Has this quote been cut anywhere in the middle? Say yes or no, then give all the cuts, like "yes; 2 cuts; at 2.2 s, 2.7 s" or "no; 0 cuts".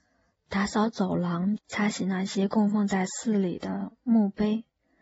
yes; 1 cut; at 1.6 s